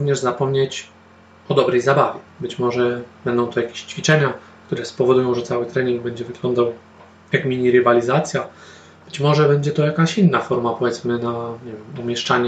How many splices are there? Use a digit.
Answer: 1